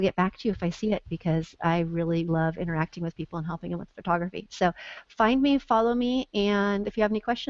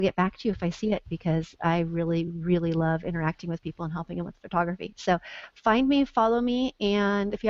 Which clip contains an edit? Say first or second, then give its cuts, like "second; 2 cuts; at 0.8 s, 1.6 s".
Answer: first; 1 cut; at 2.3 s